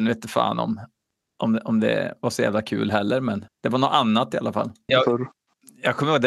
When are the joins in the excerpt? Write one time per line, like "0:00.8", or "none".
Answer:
0:03.5
0:04.9